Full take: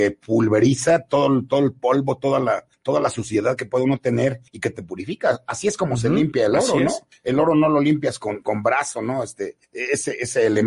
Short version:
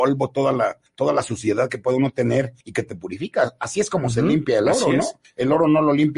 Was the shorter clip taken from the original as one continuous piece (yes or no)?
yes